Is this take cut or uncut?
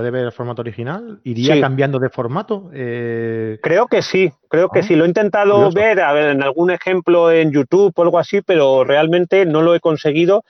uncut